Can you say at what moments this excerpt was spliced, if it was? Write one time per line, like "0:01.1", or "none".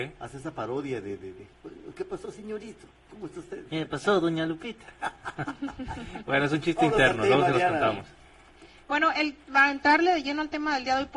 none